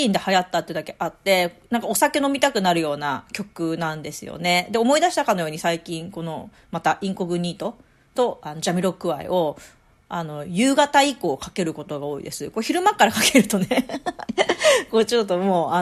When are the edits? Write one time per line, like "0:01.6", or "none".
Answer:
none